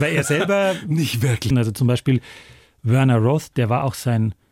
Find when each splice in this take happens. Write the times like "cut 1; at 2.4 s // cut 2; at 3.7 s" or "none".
cut 1; at 1.5 s // cut 2; at 3.5 s